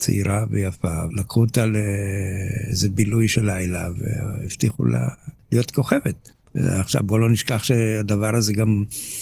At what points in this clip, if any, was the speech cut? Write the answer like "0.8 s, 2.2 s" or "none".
1.1 s